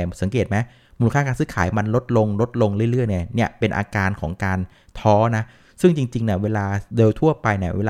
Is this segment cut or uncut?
cut